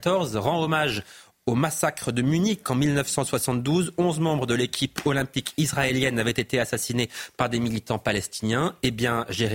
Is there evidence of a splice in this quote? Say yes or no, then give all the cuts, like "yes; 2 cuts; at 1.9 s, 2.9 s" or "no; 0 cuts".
no; 0 cuts